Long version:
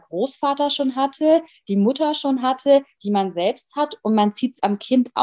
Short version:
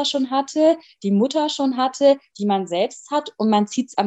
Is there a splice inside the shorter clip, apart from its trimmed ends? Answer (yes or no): no